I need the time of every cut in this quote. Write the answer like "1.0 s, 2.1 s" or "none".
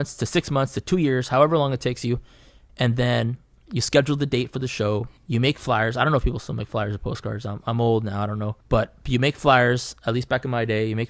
5.2 s, 8.6 s